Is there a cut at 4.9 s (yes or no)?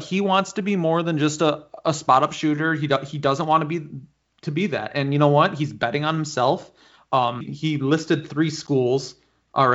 no